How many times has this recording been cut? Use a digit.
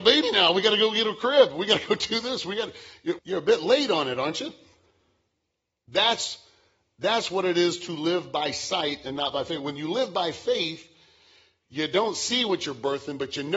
1